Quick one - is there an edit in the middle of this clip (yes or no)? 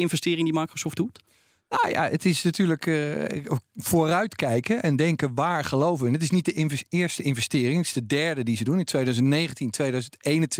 no